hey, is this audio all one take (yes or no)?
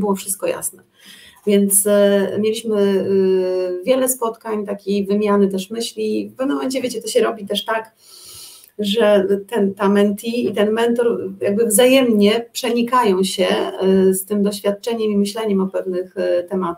yes